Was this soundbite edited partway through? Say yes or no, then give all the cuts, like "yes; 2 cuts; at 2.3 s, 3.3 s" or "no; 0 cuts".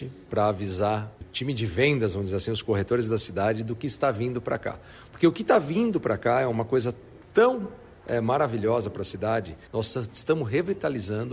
yes; 2 cuts; at 1.2 s, 9.7 s